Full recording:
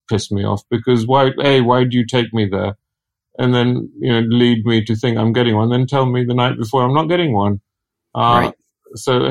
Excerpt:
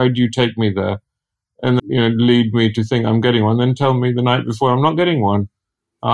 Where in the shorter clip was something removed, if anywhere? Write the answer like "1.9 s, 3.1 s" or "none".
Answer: 1.8 s